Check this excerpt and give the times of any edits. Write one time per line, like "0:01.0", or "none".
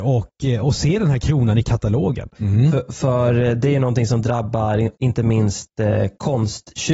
0:02.4